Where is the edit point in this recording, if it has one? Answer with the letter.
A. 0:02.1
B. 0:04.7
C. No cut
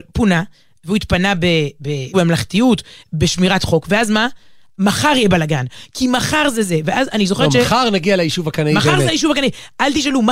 A